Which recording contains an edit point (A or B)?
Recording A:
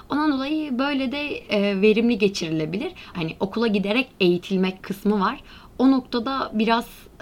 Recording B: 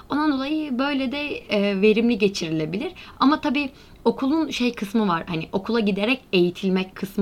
A